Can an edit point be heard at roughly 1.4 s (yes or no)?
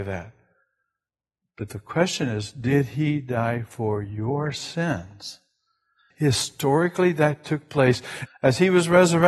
no